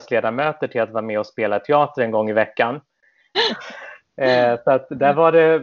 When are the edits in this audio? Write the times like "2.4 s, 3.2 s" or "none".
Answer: 3.3 s

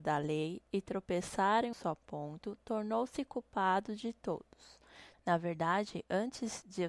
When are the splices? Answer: 1.7 s, 5.1 s

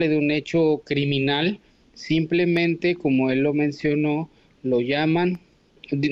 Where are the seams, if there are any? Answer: none

